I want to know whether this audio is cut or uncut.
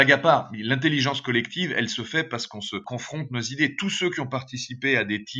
uncut